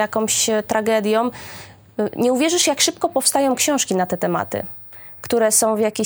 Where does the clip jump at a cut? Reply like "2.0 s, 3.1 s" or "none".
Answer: none